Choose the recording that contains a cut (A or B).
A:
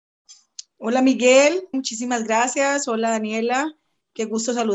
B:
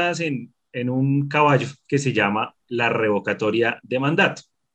A